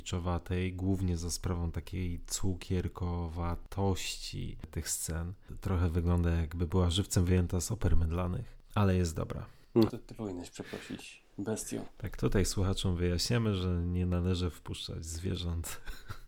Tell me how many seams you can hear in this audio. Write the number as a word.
one